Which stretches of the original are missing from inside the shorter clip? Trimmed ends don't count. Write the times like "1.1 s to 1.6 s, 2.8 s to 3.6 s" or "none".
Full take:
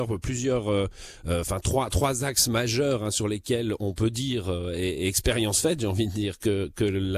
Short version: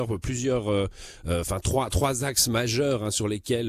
none